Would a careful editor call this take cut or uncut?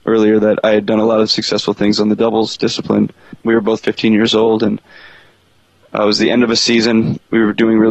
cut